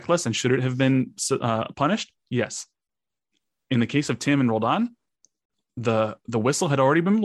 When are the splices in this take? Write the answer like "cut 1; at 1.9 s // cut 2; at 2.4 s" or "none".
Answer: none